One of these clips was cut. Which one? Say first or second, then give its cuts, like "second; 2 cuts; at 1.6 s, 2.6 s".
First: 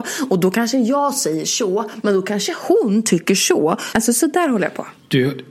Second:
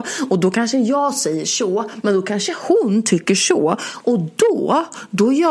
first; 1 cut; at 3.9 s